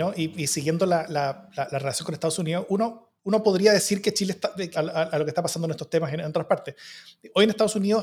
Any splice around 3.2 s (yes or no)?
yes